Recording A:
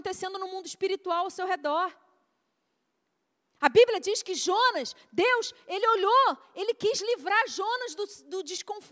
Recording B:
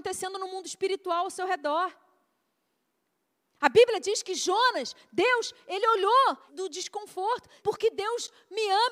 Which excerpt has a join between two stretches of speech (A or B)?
B